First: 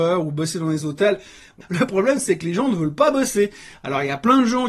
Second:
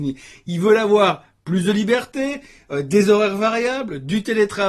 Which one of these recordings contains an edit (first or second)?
first